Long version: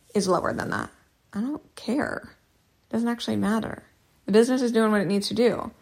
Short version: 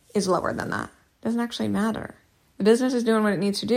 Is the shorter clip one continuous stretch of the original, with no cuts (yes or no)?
no